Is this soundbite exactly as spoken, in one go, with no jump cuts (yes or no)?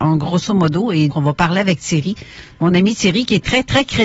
no